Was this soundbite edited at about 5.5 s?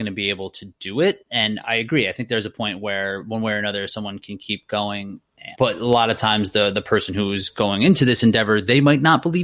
yes; 2 cuts; at 1.6 s, 5.5 s

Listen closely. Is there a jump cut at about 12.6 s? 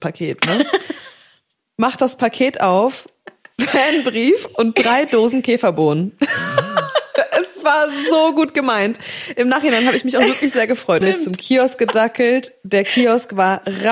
no; 1 cut; at 11.0 s

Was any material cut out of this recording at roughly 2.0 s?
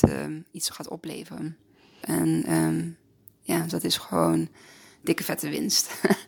yes; 2 cuts; at 2.0 s, 3.7 s

